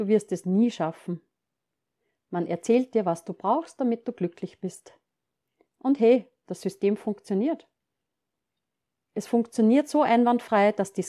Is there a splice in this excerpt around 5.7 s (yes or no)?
yes